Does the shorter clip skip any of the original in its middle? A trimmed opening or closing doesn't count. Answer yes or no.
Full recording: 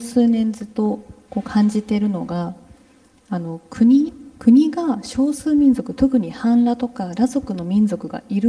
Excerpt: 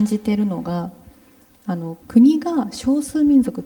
yes